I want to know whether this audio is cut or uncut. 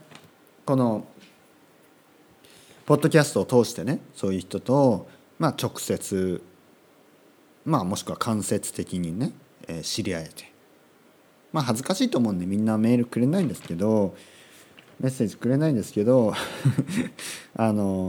uncut